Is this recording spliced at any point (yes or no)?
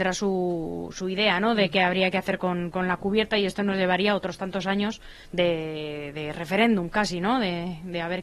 yes